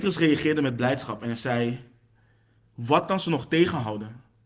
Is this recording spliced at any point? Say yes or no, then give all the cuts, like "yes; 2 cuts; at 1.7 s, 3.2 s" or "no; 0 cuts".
no; 0 cuts